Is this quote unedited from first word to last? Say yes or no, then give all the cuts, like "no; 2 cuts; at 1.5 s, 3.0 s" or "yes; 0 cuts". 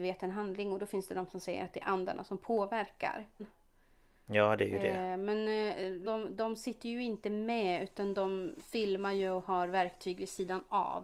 no; 2 cuts; at 3.4 s, 6.0 s